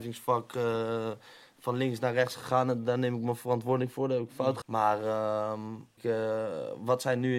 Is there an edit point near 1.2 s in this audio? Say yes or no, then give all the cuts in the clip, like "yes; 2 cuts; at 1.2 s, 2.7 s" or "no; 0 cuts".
no; 2 cuts; at 4.6 s, 6.0 s